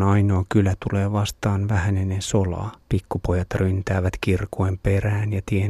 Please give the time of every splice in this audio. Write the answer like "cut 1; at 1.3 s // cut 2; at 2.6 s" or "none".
cut 1; at 2.8 s